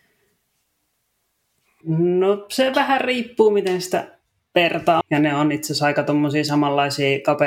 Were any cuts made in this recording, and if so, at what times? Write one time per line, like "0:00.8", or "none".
0:01.8
0:05.0

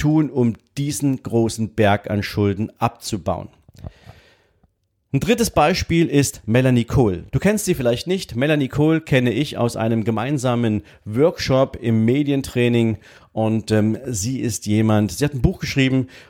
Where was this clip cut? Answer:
none

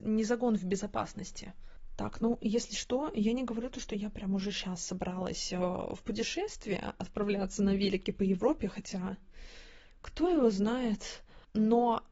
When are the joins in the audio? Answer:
none

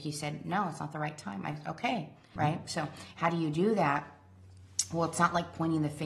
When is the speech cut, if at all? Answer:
0:02.4

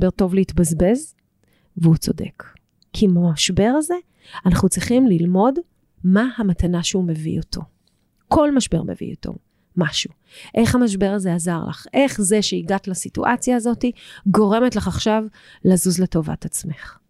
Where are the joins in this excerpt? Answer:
none

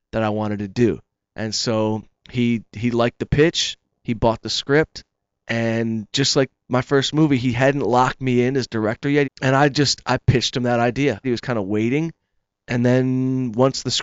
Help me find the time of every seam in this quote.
0:09.2
0:11.2

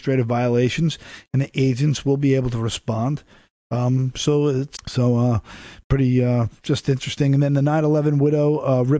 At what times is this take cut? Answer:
0:04.8

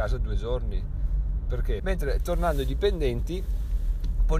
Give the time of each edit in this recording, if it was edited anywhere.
0:01.8

